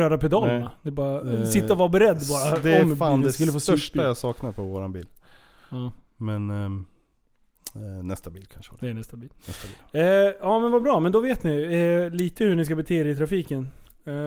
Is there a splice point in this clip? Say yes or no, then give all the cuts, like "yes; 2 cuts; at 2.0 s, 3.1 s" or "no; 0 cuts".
no; 0 cuts